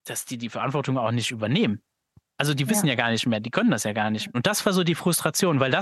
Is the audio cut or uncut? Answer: cut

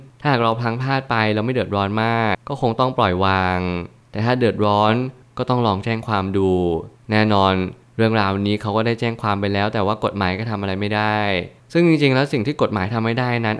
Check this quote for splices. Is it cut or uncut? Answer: cut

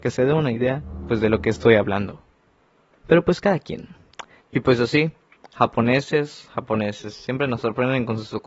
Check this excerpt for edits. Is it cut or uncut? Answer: cut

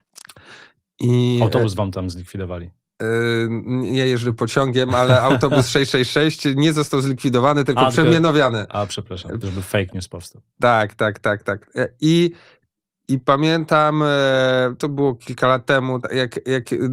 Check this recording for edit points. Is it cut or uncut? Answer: cut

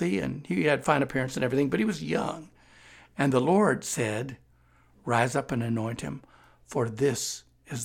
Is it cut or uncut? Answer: uncut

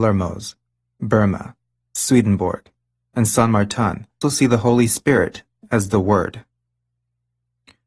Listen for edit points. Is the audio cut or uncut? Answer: cut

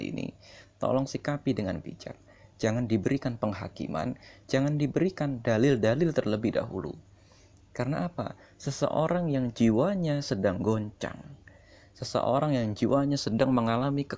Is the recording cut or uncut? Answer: uncut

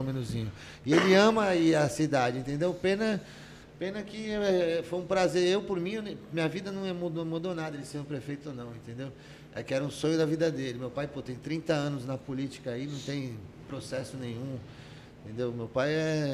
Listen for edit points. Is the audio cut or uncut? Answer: uncut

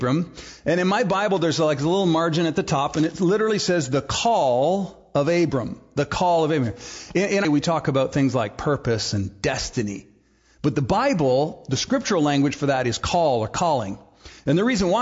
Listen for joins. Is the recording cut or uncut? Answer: cut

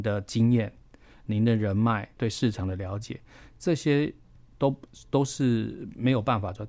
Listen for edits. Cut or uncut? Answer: cut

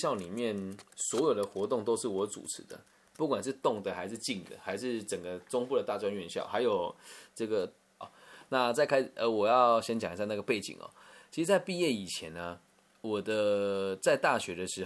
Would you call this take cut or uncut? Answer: cut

